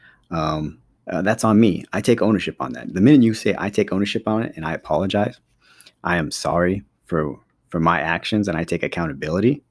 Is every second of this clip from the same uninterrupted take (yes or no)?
no